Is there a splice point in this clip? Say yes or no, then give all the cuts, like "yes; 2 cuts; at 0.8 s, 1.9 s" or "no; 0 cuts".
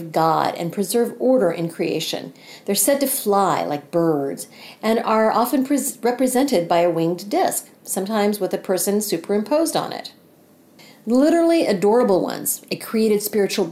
no; 0 cuts